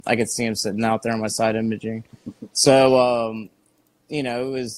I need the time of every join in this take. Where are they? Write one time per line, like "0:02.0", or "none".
none